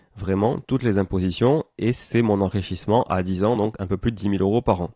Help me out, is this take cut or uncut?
uncut